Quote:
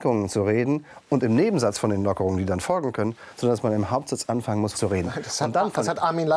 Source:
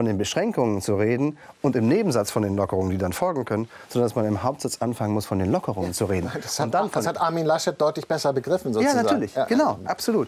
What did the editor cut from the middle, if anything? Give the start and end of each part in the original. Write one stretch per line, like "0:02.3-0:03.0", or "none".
0:05.3-0:05.9